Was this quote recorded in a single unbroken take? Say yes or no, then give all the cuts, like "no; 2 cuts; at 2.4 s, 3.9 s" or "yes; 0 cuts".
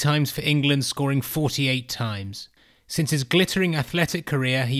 yes; 0 cuts